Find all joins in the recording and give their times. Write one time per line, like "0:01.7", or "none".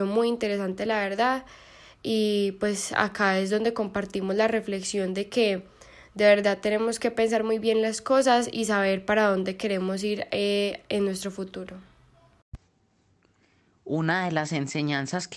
none